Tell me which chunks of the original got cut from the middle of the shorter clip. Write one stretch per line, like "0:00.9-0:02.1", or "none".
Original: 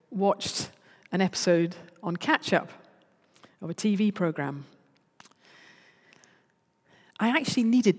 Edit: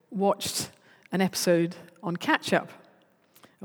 none